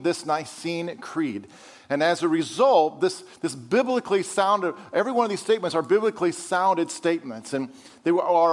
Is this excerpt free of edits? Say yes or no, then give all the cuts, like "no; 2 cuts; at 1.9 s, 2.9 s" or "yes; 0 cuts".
yes; 0 cuts